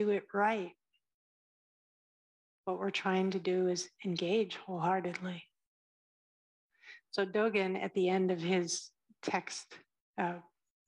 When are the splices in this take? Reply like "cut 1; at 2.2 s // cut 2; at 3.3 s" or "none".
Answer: none